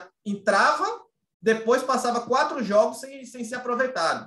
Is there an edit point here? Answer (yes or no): no